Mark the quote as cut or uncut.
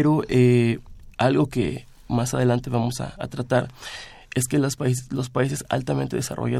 cut